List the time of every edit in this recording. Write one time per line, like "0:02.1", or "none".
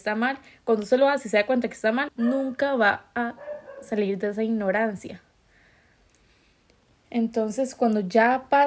0:02.1